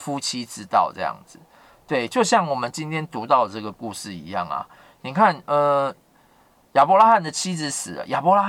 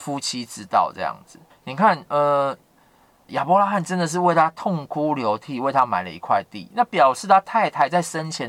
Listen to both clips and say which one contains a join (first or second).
second